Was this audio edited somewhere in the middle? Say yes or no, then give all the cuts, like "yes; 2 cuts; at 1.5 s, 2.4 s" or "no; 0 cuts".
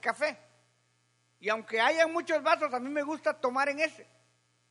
no; 0 cuts